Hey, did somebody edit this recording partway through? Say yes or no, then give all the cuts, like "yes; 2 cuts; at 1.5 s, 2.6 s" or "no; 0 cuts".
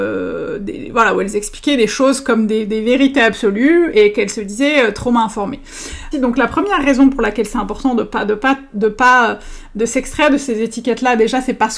yes; 1 cut; at 6.1 s